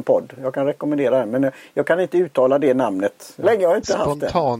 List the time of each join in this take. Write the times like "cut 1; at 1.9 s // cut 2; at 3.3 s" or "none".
cut 1; at 3.4 s

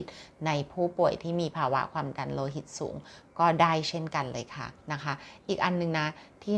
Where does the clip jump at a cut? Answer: cut 1; at 4.8 s

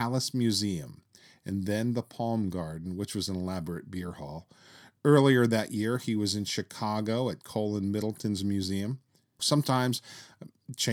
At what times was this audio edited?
cut 1; at 9.4 s

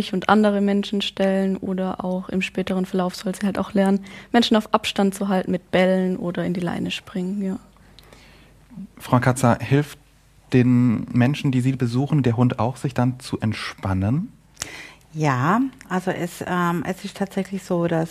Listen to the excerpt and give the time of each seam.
none

